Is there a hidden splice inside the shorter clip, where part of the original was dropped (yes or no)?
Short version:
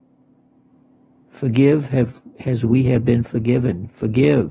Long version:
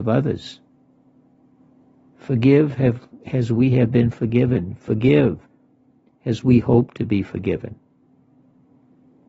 no